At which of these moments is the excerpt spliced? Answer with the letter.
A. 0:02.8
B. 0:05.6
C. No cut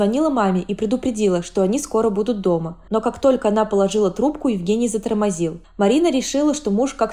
B